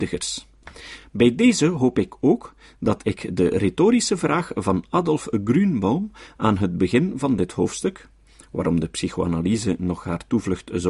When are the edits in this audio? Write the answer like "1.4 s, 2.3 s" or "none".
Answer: none